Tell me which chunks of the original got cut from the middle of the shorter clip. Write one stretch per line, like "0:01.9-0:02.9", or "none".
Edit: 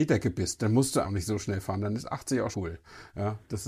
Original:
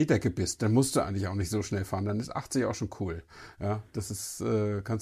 0:01.0-0:01.3
0:02.8-0:03.0